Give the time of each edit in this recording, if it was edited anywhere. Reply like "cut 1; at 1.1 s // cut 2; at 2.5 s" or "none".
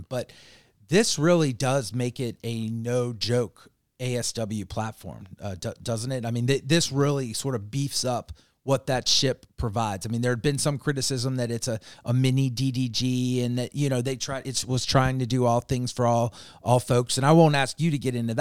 none